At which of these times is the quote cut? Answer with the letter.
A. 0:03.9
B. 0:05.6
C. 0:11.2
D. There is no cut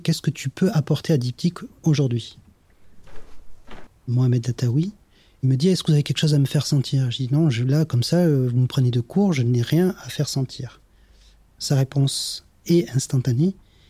A